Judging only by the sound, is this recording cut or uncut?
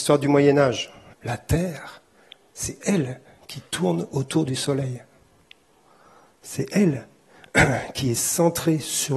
cut